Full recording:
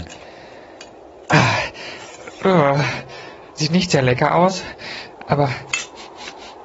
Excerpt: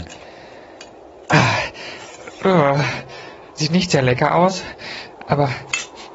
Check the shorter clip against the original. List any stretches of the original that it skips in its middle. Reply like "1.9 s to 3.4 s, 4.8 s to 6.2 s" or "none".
none

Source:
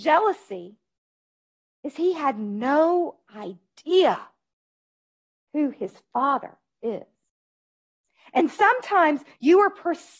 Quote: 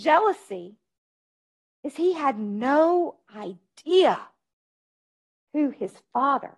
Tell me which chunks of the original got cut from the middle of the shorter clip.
none

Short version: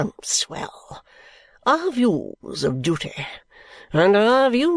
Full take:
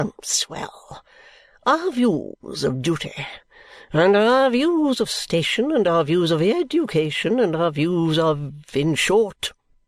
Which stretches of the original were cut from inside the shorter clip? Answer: none

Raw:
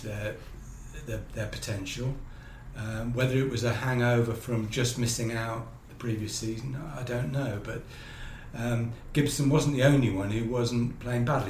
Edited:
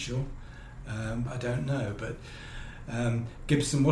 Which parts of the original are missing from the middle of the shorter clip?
3.1 s to 6.9 s

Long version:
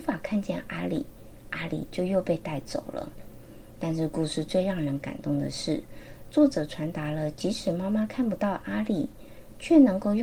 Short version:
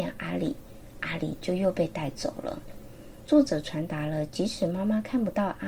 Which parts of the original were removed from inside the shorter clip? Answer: 3.8 s to 6.3 s

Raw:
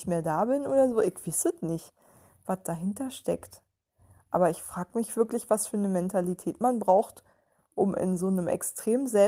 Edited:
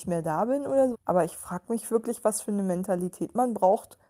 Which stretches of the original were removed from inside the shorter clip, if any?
0.9 s to 4.2 s

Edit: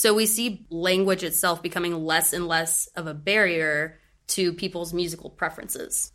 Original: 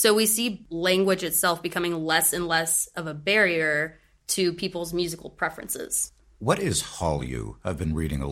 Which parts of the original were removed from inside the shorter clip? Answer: none

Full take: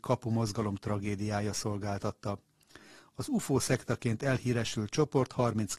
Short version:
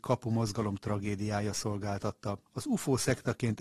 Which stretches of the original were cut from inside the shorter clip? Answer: 2.5 s to 3.1 s

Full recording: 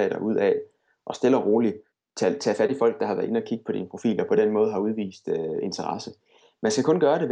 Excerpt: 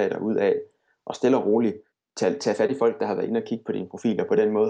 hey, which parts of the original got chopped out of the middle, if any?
none

